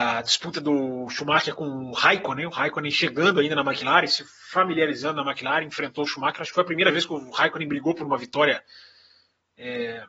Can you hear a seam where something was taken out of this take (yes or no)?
no